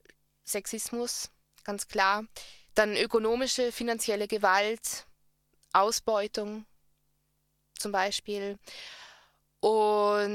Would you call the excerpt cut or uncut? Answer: uncut